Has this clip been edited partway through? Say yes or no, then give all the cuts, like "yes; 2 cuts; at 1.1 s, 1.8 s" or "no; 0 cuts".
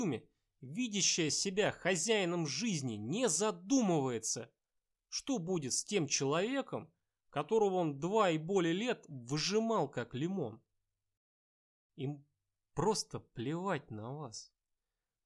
no; 0 cuts